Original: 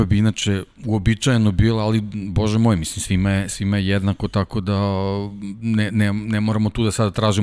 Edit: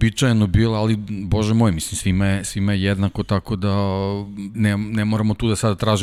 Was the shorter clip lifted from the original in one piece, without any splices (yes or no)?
no